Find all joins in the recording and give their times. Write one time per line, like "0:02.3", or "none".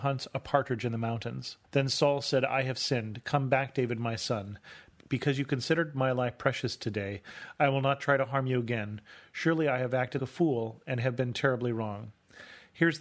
0:01.6
0:10.2